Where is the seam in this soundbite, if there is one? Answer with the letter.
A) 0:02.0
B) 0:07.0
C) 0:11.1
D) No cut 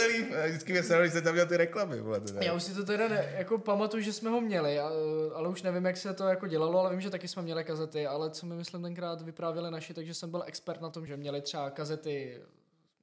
C